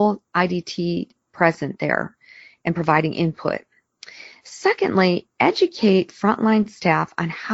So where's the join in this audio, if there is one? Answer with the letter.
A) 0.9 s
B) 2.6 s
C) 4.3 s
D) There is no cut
D